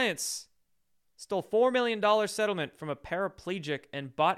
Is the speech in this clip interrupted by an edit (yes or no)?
no